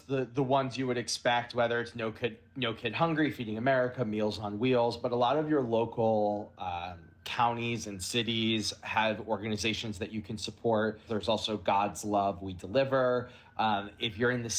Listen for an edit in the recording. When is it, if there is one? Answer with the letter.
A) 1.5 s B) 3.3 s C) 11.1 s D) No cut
C